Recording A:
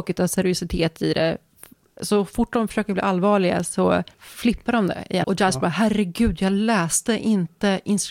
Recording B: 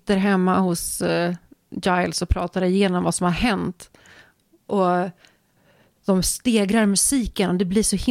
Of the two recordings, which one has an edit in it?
A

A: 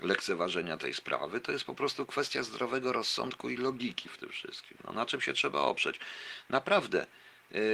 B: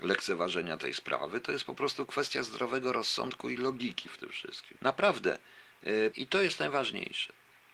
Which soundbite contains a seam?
B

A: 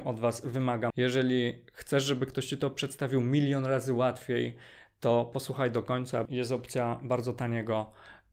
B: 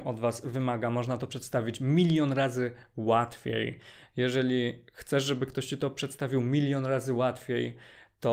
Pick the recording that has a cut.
A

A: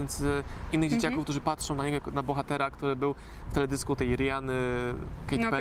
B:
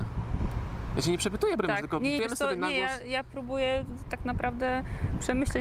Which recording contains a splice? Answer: B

